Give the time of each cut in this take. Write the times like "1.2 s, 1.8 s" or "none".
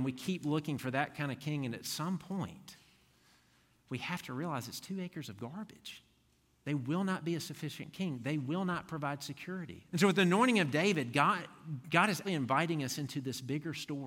9.9 s, 12.2 s